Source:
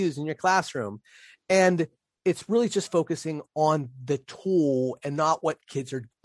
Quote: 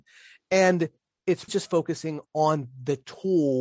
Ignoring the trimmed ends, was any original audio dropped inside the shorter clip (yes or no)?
yes